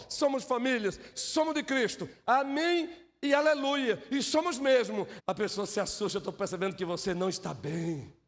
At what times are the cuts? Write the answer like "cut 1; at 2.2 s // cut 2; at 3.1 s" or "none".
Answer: cut 1; at 1.1 s // cut 2; at 5.2 s